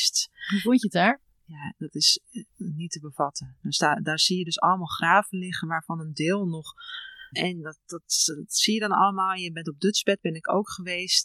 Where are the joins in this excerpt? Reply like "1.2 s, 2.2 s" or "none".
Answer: 2.5 s, 7.3 s

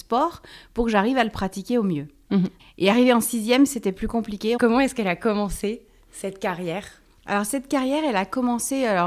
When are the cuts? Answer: 2.6 s, 4.6 s

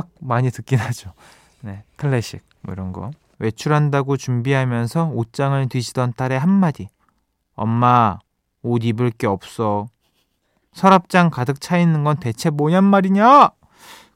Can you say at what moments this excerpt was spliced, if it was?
3.3 s

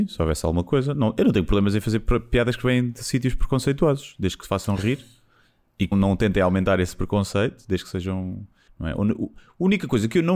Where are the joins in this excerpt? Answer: 5.9 s, 8.7 s

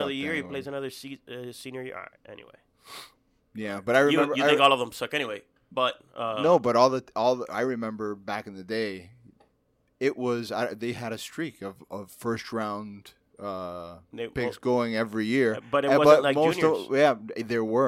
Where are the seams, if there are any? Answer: none

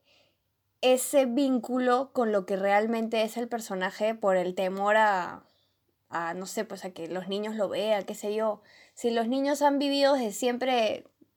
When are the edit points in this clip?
none

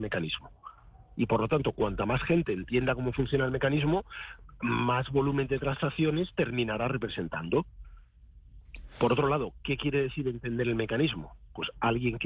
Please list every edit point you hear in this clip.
none

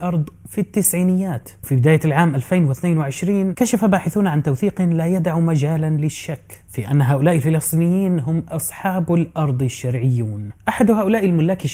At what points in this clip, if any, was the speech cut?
none

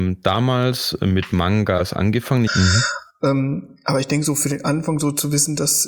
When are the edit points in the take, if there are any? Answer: 2.5 s

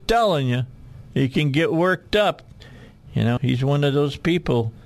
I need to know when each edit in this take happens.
3.4 s

